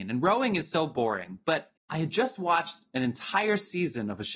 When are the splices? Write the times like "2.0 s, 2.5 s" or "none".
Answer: 1.8 s